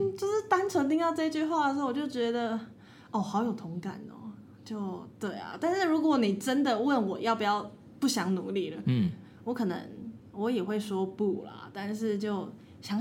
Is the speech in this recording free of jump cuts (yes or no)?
yes